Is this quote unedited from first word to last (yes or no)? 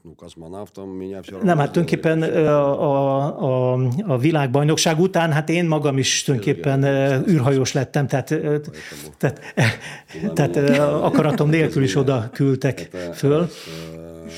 yes